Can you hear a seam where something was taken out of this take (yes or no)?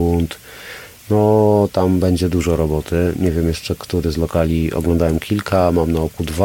no